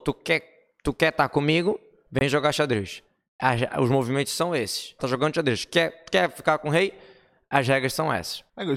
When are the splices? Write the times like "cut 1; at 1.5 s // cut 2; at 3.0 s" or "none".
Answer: cut 1; at 5.0 s